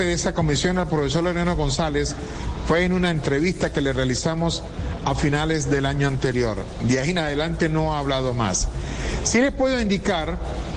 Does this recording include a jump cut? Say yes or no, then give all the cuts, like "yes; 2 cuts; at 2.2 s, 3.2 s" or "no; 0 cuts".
no; 0 cuts